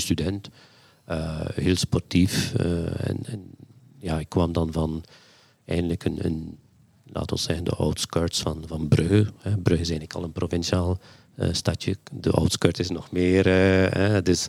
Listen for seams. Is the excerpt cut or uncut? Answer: uncut